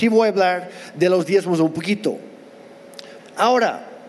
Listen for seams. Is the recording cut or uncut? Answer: cut